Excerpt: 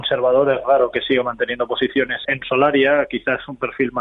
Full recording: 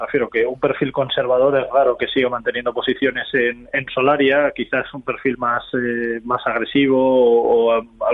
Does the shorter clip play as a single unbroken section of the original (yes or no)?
no